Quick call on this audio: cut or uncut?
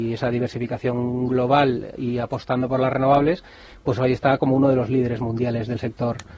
uncut